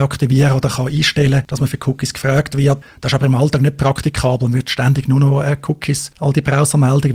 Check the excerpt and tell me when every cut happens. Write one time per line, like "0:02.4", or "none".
0:06.1